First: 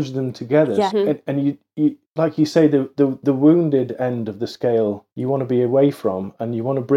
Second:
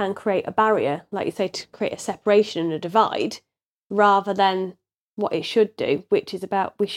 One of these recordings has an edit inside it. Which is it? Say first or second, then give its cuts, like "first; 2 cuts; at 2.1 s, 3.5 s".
first; 3 cuts; at 0.9 s, 2.0 s, 5.1 s